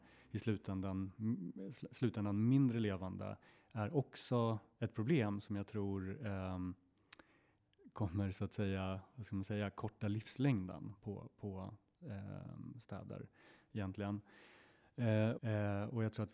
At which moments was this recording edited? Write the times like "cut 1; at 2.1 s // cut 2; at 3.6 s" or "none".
cut 1; at 15.4 s